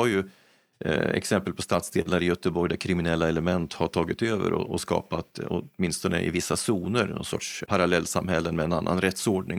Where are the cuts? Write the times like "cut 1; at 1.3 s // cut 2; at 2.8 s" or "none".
cut 1; at 4.7 s // cut 2; at 7.7 s